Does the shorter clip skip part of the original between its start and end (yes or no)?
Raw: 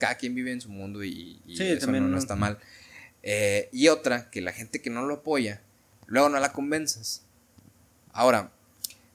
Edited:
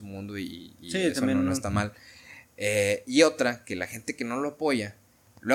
no